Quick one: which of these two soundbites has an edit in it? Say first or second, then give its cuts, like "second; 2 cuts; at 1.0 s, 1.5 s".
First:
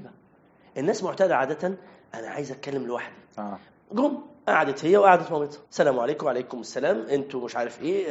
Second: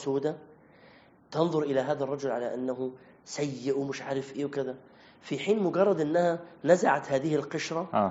first; 2 cuts; at 3.7 s, 5.7 s